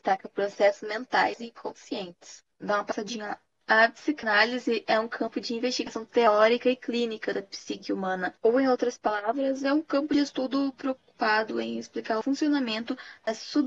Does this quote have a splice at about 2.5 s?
yes; 1 cut; at 2.5 s

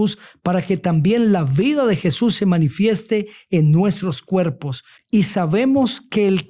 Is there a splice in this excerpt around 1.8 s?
no; 1 cut; at 5.0 s

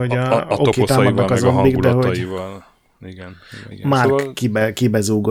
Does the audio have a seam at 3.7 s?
yes; 1 cut; at 3.7 s

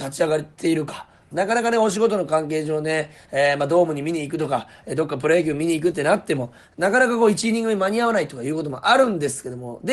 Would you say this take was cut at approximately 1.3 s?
yes; 1 cut; at 1.3 s

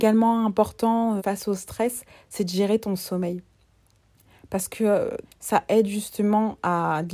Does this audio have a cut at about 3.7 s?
no; 2 cuts; at 1.2 s, 5.2 s

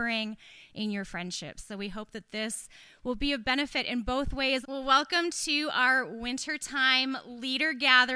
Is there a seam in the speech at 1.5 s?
no; 1 cut; at 4.6 s

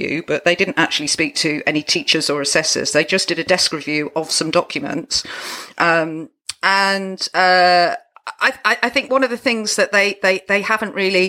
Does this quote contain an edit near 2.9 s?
no; 0 cuts

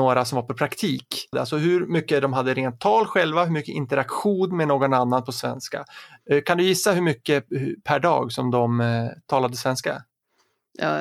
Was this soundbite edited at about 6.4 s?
no; 1 cut; at 1.3 s

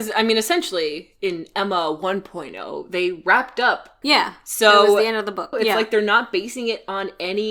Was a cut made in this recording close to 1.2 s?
no; 2 cuts; at 4.0 s, 5.5 s

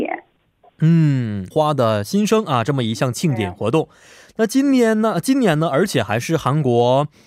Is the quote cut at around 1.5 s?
yes; 1 cut; at 1.5 s

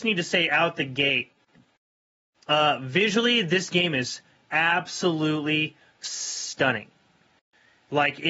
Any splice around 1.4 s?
no; 0 cuts

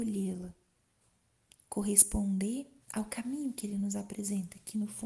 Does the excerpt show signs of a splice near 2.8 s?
yes; 1 cut; at 2.8 s

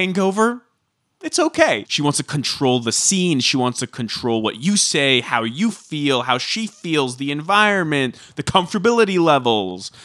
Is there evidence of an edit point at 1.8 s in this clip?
yes; 1 cut; at 1.8 s

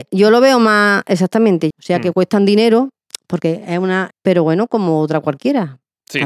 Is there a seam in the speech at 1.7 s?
yes; 2 cuts; at 1.7 s, 4.1 s

